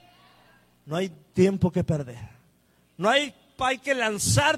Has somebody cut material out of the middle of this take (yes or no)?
no